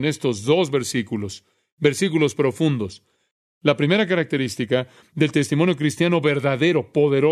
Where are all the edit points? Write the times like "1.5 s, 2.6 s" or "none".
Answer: none